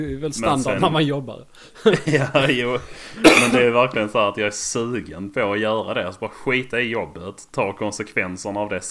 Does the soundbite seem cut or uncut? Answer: uncut